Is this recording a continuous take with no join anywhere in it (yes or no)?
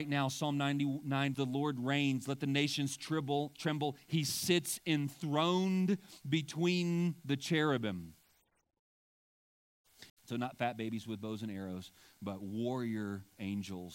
no